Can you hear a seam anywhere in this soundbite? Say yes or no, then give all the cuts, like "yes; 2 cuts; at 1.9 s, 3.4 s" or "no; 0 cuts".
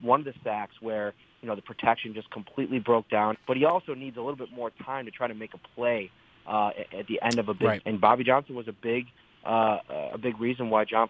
yes; 2 cuts; at 3.3 s, 7.8 s